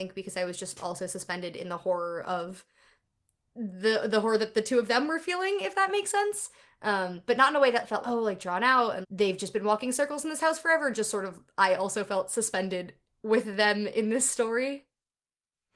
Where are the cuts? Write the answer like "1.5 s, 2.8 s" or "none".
8.0 s, 9.0 s